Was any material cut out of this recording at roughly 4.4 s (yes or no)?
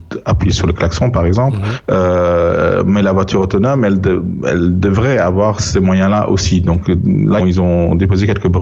no